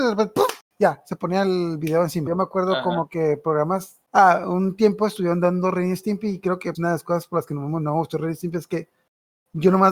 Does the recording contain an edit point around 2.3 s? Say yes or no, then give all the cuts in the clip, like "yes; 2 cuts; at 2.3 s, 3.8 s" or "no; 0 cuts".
yes; 3 cuts; at 2.3 s, 4.1 s, 6.7 s